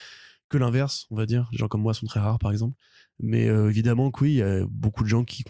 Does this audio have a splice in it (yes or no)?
no